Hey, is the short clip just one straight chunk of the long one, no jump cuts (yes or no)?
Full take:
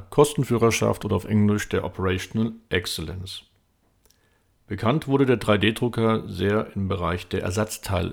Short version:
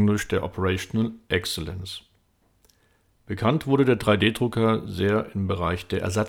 yes